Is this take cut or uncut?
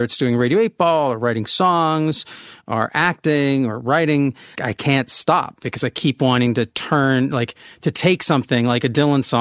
cut